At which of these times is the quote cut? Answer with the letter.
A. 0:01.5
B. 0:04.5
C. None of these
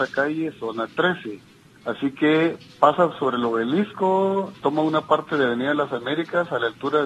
B